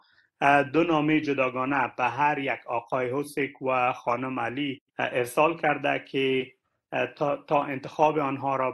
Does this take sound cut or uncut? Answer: cut